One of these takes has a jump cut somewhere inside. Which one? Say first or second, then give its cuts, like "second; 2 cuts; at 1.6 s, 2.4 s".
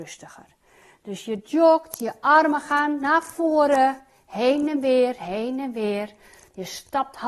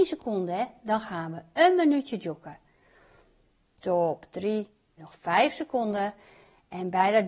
second; 1 cut; at 5.0 s